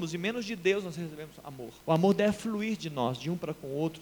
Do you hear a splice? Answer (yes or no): yes